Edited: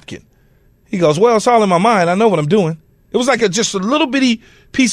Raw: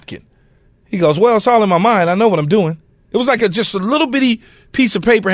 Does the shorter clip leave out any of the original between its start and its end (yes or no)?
no